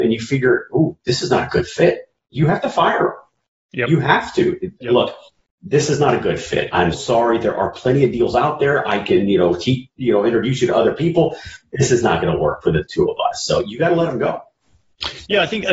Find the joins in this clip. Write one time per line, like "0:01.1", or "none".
0:01.0
0:06.9